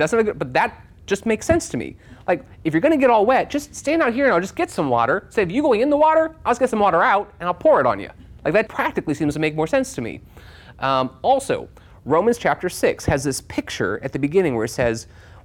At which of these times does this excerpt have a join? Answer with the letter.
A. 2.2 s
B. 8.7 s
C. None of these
B